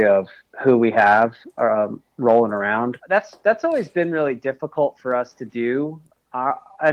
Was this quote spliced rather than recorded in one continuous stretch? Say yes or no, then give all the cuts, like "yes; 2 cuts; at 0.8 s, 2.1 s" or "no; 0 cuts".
yes; 1 cut; at 3.0 s